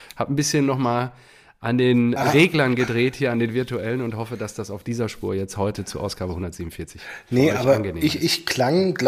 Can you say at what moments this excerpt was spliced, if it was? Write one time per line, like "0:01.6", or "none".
none